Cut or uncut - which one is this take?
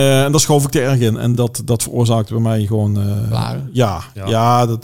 uncut